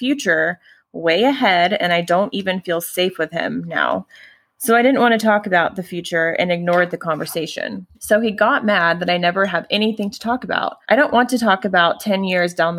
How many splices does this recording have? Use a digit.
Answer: 2